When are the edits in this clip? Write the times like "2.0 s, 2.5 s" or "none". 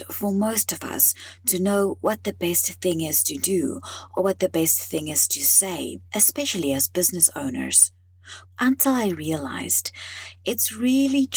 6.1 s, 8.4 s